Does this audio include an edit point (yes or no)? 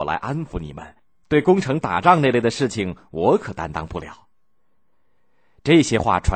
no